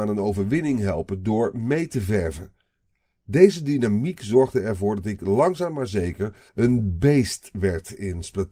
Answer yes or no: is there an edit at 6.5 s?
yes